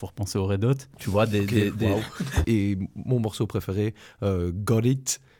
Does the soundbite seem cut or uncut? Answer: cut